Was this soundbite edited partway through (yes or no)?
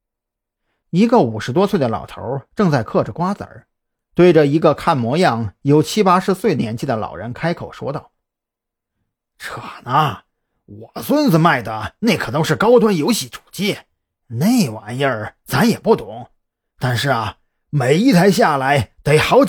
no